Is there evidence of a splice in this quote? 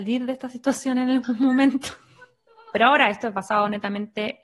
yes; 1 cut; at 2.7 s

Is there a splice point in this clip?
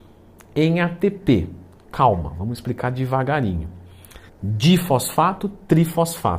yes; 1 cut; at 4.3 s

